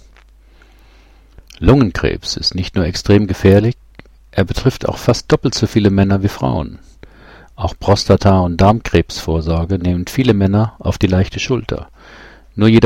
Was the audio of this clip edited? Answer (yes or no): yes